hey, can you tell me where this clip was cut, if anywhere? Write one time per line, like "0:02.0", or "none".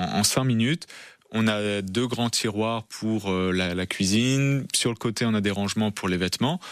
none